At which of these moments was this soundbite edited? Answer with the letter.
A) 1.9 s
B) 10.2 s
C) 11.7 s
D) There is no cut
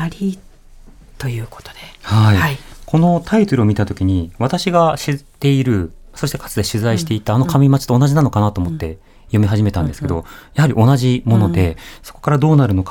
D